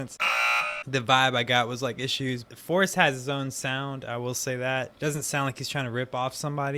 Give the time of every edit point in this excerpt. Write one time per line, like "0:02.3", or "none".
none